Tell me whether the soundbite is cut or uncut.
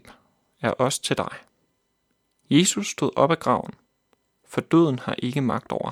uncut